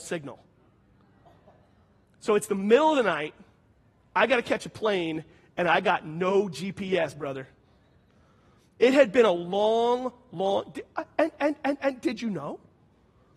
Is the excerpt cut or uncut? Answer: uncut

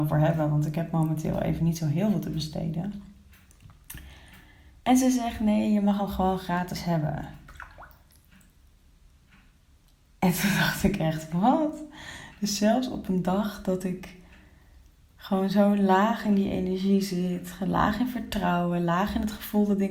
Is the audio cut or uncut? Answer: uncut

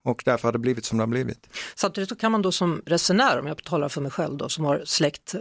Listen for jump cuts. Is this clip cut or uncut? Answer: uncut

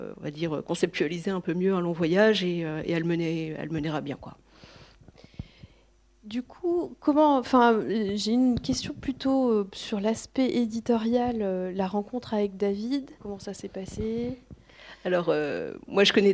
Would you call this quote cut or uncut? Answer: cut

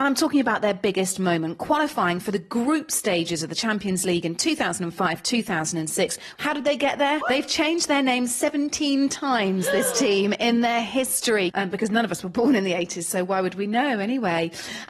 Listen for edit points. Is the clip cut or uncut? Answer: cut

